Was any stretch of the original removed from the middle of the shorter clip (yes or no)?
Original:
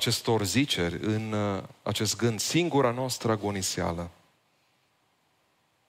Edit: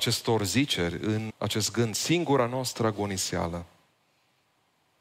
yes